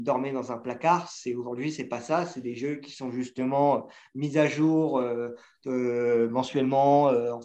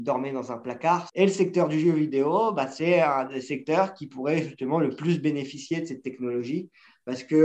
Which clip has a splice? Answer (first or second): second